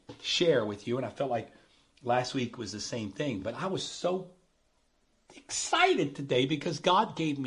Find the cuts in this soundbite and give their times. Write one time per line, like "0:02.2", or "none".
none